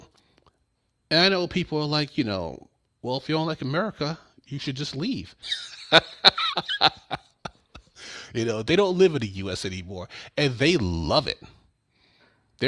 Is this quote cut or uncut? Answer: cut